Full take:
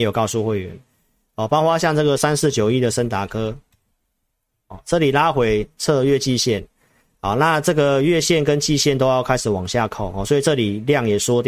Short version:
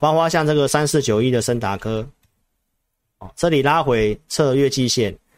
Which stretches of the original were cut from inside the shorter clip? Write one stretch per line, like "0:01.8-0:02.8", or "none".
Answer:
none